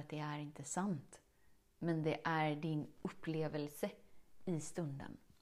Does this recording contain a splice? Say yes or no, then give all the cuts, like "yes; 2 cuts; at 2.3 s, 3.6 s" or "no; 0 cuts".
no; 0 cuts